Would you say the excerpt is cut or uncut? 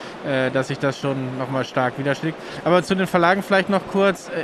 uncut